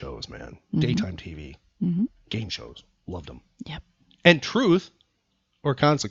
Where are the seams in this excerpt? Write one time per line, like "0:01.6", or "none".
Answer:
none